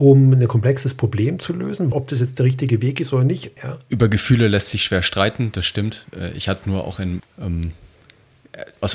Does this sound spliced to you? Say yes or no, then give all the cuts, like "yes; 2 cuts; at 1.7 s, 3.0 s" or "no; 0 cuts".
yes; 3 cuts; at 1.9 s, 3.6 s, 7.2 s